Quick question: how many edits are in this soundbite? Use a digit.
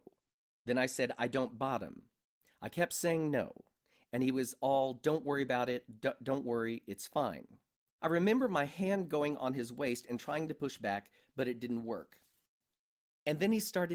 1